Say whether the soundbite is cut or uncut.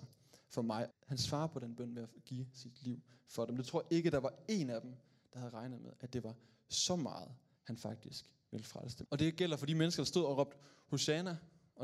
cut